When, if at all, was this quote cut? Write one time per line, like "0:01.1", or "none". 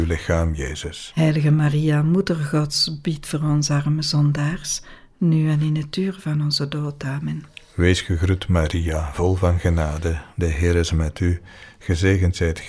none